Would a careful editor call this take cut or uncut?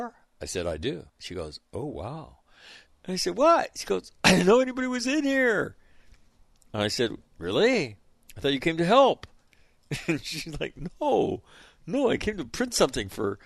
cut